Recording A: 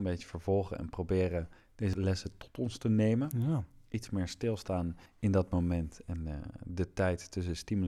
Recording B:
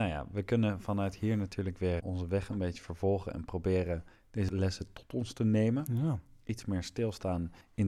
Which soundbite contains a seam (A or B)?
B